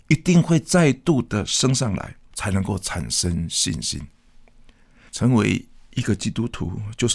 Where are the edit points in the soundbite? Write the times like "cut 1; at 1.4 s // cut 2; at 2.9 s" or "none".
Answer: cut 1; at 2.3 s // cut 2; at 5.1 s